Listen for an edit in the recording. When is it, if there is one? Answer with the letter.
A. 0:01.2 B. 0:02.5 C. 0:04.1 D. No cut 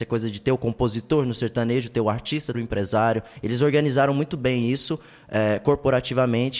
B